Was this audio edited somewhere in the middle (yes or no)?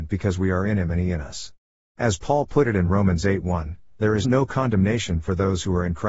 yes